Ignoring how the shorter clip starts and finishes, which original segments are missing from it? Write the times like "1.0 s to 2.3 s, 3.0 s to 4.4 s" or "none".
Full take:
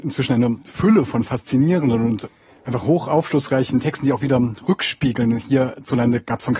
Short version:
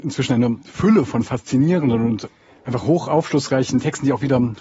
none